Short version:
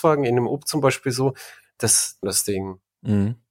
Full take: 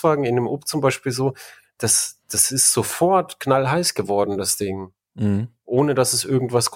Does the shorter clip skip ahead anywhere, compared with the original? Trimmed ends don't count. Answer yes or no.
yes